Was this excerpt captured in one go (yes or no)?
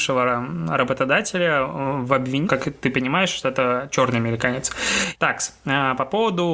no